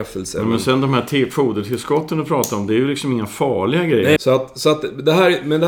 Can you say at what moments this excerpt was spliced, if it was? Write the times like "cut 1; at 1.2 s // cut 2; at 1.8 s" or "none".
cut 1; at 4.2 s